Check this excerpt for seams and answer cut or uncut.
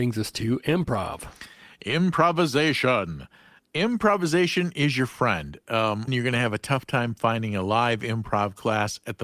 cut